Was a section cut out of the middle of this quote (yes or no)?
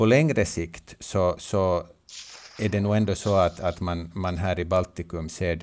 no